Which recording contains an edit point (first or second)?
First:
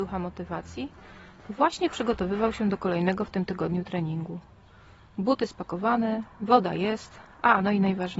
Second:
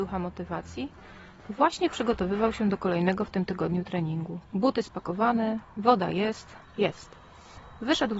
second